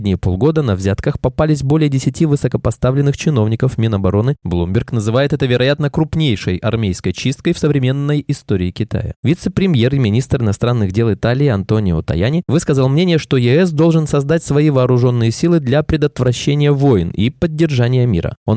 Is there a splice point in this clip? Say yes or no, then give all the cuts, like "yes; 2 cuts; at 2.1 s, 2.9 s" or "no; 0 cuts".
yes; 1 cut; at 9.2 s